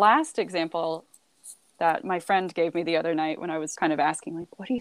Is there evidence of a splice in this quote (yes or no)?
yes